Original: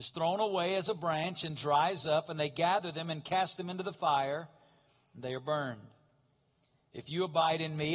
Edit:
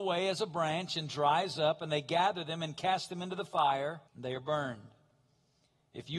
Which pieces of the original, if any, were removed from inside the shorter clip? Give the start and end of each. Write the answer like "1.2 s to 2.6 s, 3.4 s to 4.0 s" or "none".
4.5 s to 5.1 s